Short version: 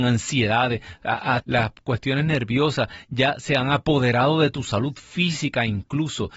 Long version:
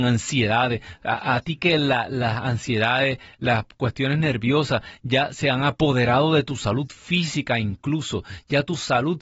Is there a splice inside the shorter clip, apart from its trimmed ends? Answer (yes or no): yes